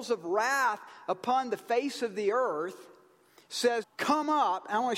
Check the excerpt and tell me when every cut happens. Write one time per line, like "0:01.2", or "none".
0:03.8

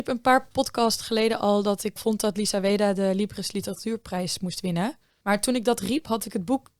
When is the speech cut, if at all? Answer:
0:02.0
0:05.2

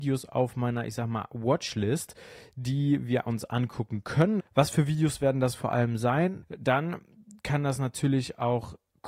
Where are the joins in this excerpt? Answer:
0:04.4
0:06.4

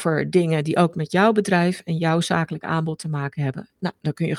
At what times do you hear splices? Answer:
none

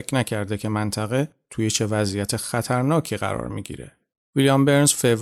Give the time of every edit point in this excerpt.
0:04.1

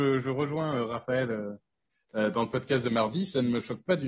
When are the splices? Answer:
none

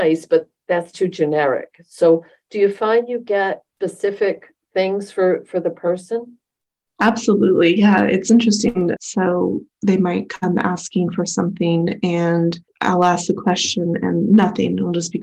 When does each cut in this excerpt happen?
0:09.0
0:12.7

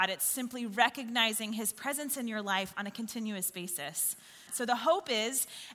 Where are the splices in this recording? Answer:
0:04.5

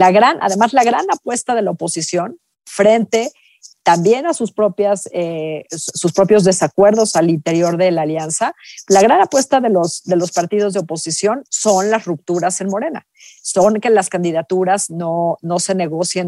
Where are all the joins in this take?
none

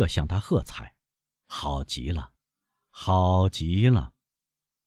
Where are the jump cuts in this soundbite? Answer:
none

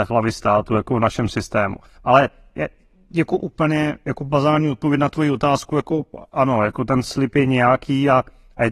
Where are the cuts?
none

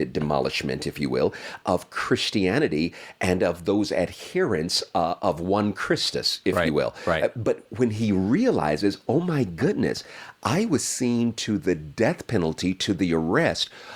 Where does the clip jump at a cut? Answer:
0:01.6

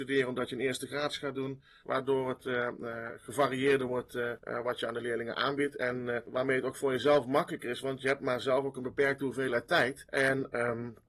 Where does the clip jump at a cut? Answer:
0:01.8

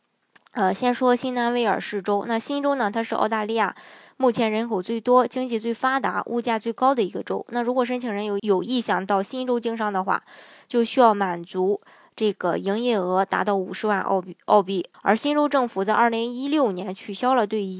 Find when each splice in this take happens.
0:08.4
0:14.9

